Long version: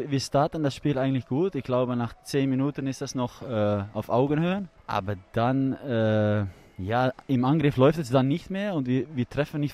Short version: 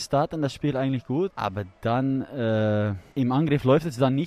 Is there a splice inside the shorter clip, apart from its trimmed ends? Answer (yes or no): yes